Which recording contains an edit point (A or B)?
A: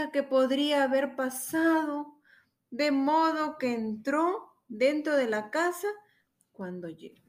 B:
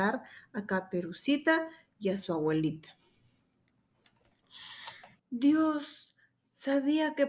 B